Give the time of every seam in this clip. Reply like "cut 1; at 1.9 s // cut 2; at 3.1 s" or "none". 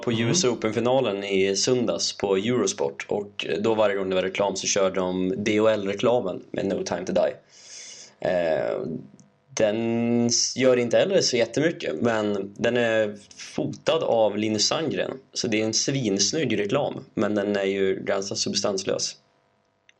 none